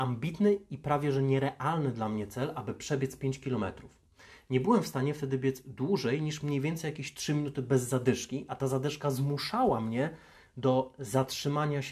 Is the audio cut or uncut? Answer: uncut